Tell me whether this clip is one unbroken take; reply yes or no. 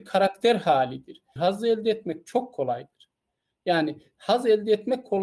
no